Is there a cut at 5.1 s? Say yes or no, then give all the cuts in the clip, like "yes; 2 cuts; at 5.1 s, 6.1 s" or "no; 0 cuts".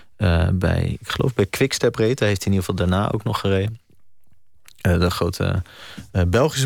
yes; 1 cut; at 5.1 s